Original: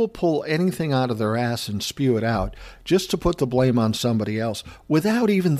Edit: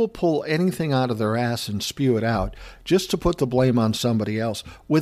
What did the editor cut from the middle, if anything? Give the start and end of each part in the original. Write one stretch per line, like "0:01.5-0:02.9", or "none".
none